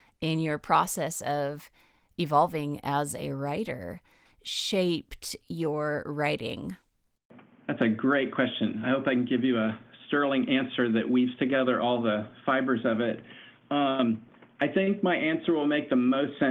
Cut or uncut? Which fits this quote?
cut